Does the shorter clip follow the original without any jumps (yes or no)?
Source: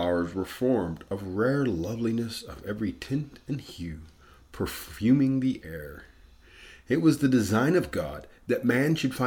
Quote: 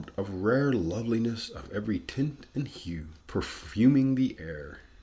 no